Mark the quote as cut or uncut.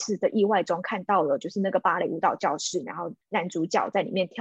uncut